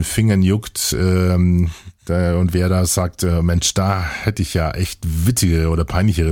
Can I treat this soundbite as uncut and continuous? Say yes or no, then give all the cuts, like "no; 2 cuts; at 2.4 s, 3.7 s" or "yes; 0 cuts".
yes; 0 cuts